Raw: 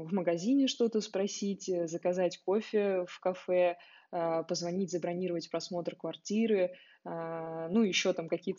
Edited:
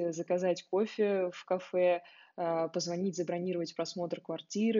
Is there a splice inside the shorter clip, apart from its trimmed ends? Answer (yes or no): no